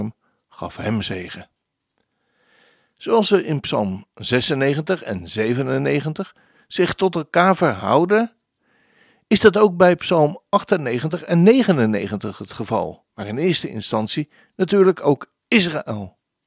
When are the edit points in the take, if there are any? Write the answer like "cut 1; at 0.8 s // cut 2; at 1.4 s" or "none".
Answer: cut 1; at 13.1 s

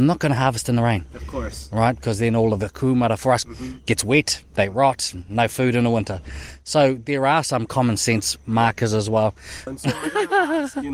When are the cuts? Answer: cut 1; at 3.4 s // cut 2; at 9.7 s

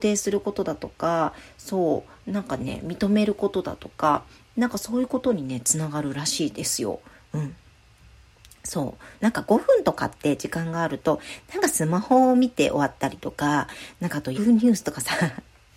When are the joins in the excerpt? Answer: cut 1; at 9.2 s // cut 2; at 14.3 s

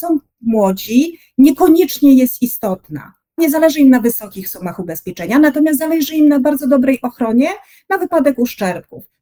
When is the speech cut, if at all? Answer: none

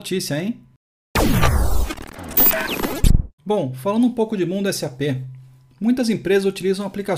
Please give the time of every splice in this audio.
cut 1; at 3.4 s

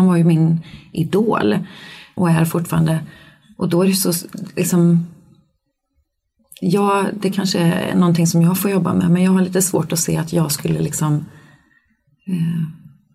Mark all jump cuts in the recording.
cut 1; at 2.2 s

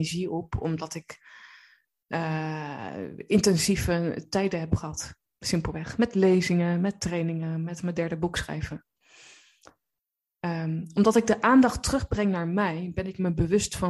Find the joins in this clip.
none

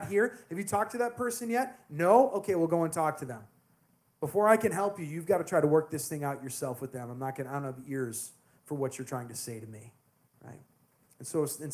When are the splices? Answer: none

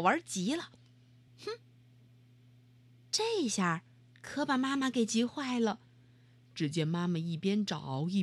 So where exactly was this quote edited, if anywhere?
cut 1; at 1.3 s

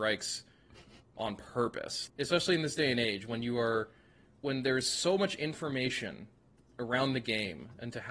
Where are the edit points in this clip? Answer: cut 1; at 2.1 s

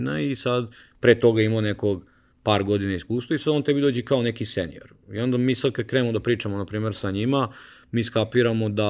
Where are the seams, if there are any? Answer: none

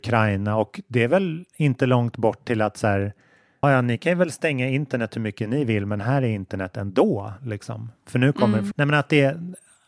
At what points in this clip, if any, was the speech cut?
cut 1; at 3.6 s // cut 2; at 8.7 s

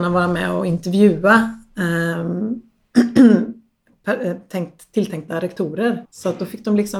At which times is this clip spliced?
cut 1; at 6.0 s

